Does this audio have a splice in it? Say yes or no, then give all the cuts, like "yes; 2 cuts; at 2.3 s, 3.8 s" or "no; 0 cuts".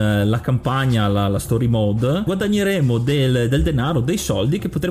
no; 0 cuts